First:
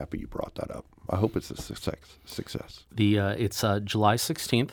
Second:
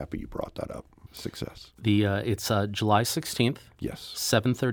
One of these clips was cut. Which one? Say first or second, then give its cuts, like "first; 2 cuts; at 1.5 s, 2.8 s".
second; 1 cut; at 1.1 s